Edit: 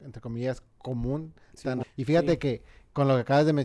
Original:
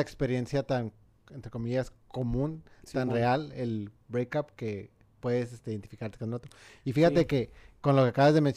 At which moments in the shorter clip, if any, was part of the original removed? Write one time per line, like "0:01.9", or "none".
0:01.8

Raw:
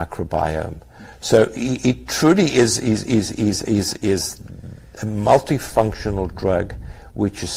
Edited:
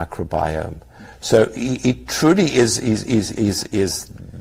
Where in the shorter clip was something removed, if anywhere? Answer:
0:03.3

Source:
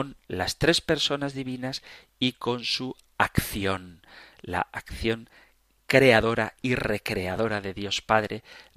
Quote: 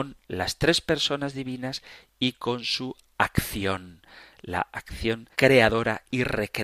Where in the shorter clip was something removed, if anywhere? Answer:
0:05.3

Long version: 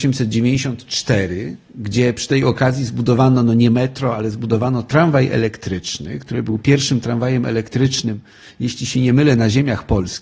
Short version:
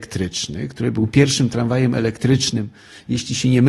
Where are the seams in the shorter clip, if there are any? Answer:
none

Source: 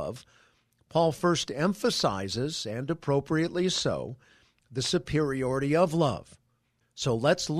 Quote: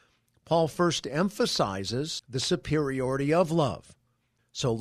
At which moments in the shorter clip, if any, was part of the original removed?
0:02.2

